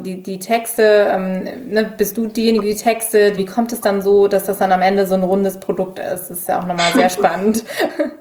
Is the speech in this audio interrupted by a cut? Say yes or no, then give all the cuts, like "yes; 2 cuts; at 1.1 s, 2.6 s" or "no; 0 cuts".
yes; 1 cut; at 3.4 s